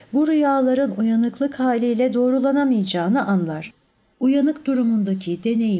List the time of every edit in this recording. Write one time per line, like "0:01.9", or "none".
0:04.1